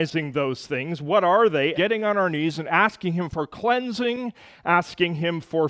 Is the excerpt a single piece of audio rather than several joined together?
no; 1 cut; at 1.7 s

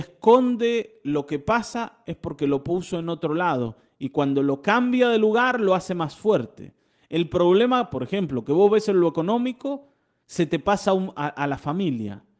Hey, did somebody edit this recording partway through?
no; 0 cuts

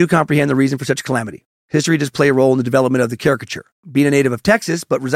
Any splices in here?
no; 0 cuts

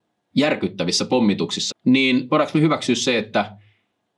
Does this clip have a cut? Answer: yes; 1 cut; at 1.7 s

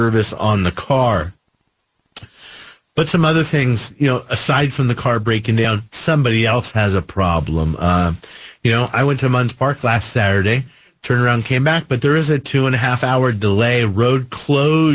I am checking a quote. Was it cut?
no; 0 cuts

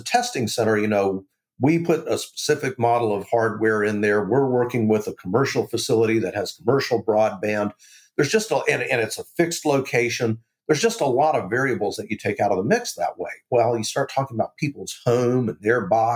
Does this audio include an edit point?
no; 0 cuts

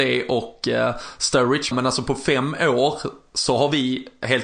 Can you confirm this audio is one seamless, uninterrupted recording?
no; 1 cut; at 1.7 s

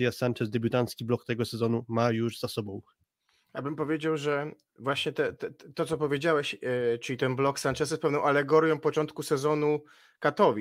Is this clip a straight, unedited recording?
yes; 0 cuts

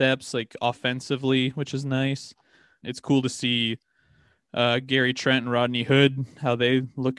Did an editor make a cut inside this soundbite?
yes; 1 cut; at 2.8 s

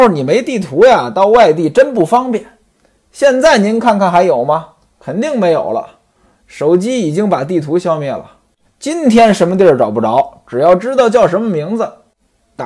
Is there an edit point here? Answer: yes; 1 cut; at 8.7 s

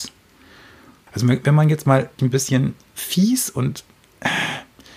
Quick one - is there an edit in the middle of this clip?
yes; 2 cuts; at 1.1 s, 2.2 s

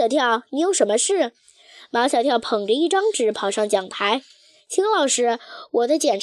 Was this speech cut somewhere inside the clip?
no; 0 cuts

